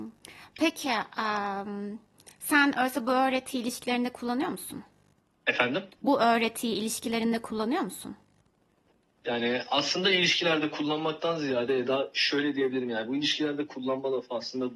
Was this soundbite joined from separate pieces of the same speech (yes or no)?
no